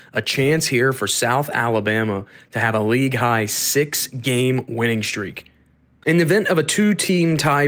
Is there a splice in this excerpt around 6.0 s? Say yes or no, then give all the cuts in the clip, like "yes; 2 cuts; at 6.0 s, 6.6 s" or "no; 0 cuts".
yes; 1 cut; at 6.0 s